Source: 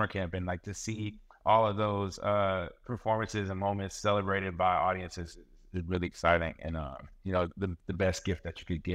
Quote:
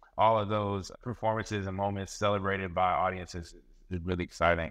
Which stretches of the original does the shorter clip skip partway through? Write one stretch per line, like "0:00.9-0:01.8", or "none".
0:02.2-0:02.8